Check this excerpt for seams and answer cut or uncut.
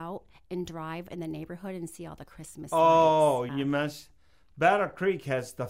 cut